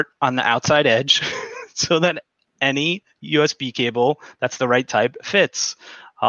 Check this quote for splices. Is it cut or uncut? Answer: uncut